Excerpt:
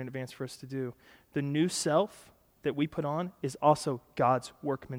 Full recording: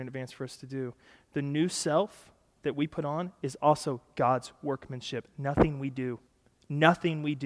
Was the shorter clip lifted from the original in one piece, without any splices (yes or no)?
yes